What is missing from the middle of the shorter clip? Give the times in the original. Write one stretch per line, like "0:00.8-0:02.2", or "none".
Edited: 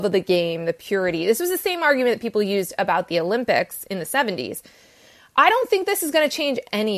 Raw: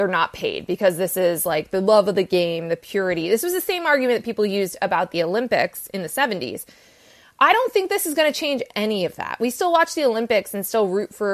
none